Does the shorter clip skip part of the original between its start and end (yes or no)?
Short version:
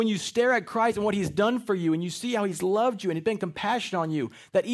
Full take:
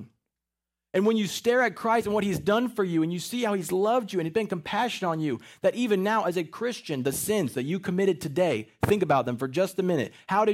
no